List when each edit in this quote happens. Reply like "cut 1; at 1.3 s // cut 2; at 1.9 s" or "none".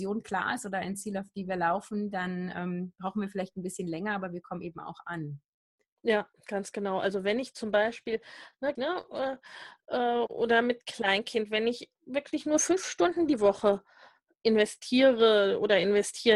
cut 1; at 8.8 s